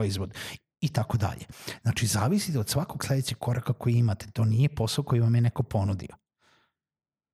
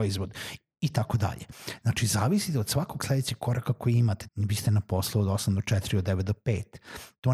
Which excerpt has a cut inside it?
second; 1 cut; at 4.3 s

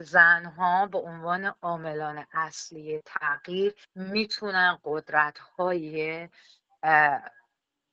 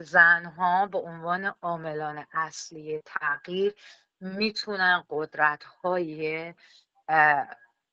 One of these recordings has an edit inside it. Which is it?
first; 1 cut; at 3.8 s

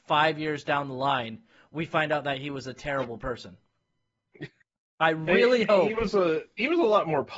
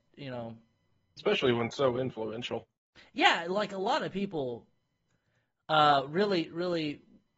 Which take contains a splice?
second; 1 cut; at 1.2 s

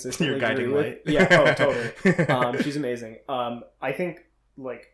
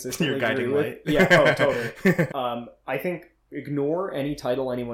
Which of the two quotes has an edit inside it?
second; 2 cuts; at 2.3 s, 3.5 s

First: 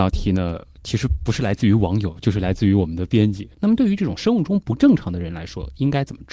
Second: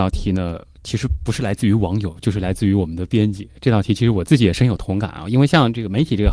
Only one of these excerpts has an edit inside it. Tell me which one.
first; 1 cut; at 3.5 s

